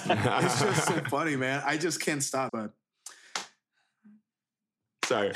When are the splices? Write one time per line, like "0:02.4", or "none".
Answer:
0:02.5